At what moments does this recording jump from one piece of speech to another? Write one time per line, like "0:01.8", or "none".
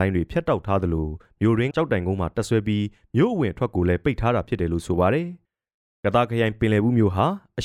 0:01.7
0:05.4